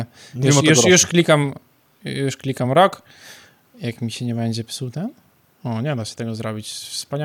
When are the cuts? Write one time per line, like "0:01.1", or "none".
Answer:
none